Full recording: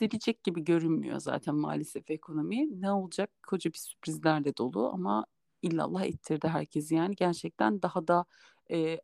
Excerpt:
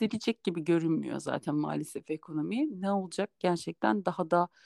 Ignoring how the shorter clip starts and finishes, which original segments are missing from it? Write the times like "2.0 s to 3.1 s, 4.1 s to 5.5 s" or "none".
3.4 s to 7.2 s

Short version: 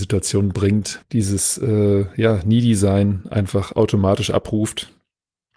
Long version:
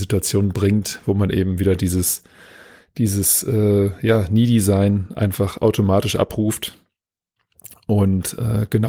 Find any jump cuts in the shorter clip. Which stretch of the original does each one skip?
1.0 s to 2.9 s

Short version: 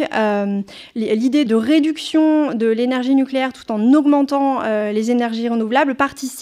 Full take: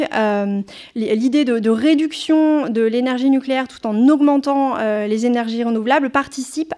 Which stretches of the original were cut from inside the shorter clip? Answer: 1.5 s to 1.6 s

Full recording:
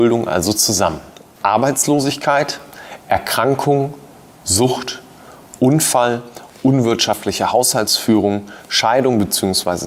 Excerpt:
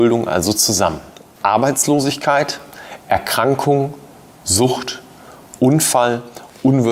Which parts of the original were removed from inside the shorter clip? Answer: none

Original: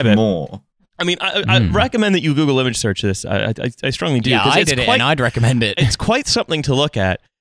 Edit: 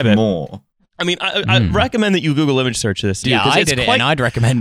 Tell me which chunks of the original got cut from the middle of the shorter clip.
3.2 s to 4.2 s

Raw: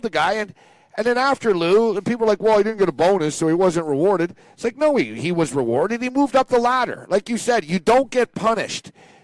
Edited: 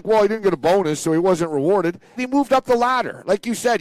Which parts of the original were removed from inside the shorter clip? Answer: 4.5 s to 6.0 s

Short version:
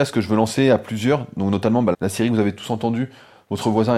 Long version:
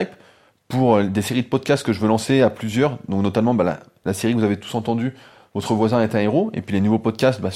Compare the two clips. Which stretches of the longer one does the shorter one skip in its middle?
3.6 s to 4.0 s

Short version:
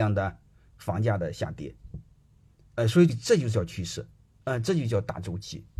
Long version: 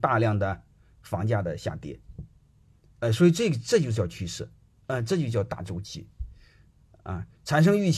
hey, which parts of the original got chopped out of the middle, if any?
3.3 s to 3.5 s

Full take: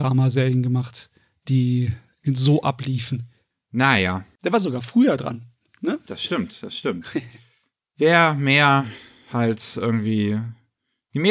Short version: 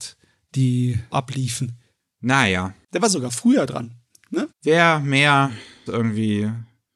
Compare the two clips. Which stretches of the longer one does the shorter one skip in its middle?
2.0 s to 2.6 s, 6.0 s to 7.8 s, 9.2 s to 9.7 s

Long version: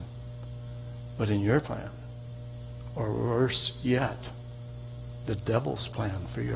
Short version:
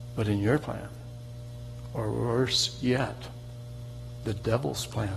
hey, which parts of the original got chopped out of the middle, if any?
none

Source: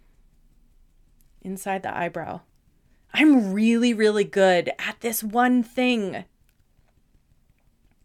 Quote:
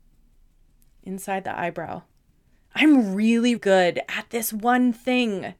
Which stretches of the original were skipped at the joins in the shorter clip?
4.0 s to 4.3 s

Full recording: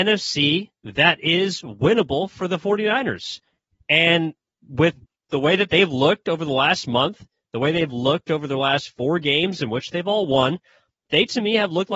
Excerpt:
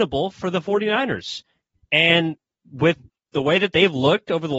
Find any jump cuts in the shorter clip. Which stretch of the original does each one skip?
none

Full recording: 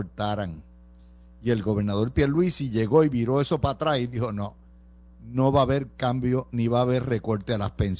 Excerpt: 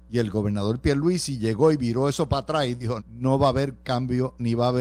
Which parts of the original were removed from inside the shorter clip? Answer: 4.3 s to 5.1 s

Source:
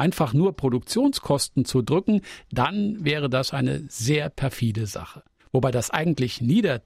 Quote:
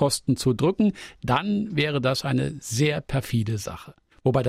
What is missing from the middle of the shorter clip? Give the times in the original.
none

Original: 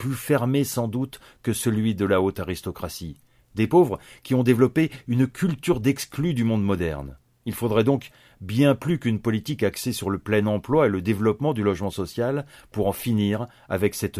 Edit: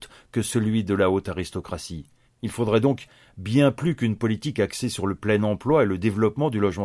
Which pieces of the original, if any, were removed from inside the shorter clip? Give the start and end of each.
3.4 s to 7.3 s

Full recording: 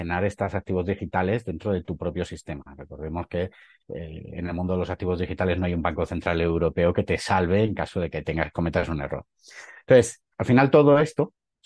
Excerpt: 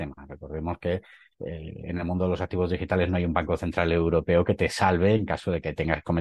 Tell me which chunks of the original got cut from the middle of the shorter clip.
none

